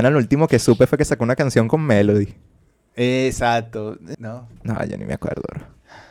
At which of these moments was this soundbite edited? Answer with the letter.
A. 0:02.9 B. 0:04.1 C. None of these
B